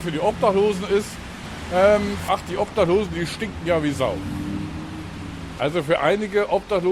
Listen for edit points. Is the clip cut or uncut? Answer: cut